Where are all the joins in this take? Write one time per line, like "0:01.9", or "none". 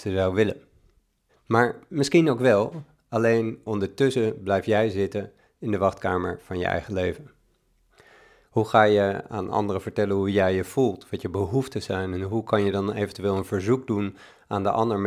0:01.3
0:08.4